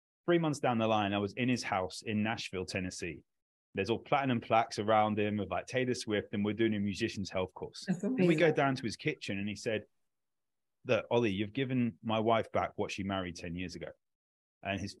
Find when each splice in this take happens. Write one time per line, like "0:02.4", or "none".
none